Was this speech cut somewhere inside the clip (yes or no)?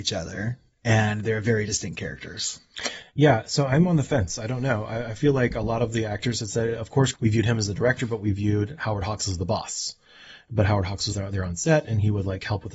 yes